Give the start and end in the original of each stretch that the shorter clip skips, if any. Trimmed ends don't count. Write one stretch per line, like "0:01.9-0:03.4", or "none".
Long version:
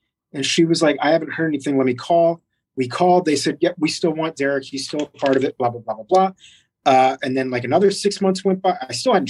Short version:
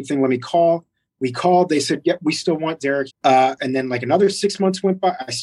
0:04.6-0:06.7